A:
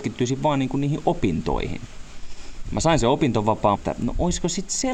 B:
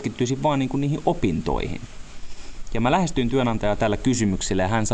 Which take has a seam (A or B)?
A